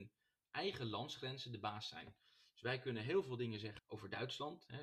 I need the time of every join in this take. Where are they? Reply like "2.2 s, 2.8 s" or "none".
3.8 s